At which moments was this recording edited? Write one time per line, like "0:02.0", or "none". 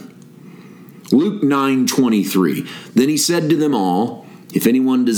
none

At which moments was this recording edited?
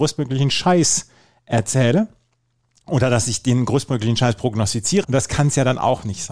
0:05.0

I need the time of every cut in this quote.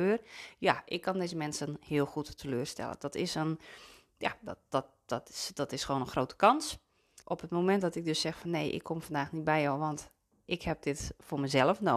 0:07.2

